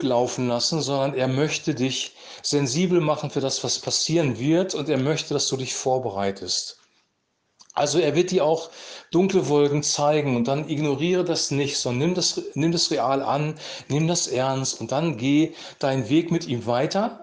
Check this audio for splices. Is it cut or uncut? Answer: uncut